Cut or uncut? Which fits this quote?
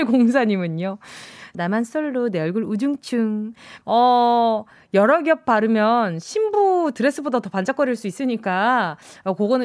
cut